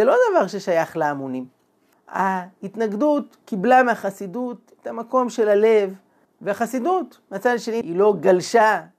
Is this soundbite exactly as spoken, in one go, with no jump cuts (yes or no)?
no